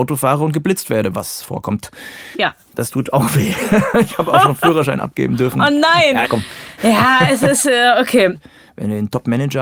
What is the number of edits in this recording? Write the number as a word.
two